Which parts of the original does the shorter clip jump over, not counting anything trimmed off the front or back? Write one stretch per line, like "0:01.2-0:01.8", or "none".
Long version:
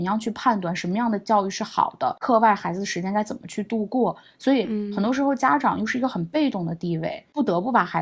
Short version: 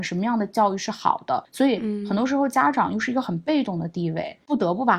0:02.2-0:04.3